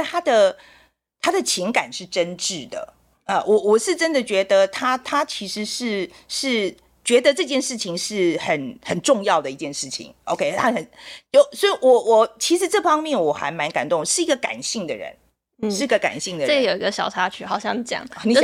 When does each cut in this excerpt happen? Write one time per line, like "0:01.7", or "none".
none